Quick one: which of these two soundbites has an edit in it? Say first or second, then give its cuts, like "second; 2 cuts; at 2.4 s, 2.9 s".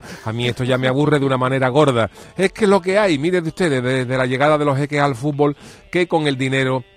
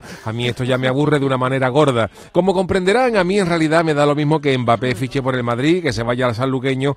second; 1 cut; at 2.3 s